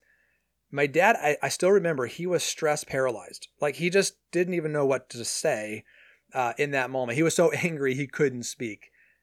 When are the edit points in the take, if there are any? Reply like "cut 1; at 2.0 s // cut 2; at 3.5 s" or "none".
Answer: none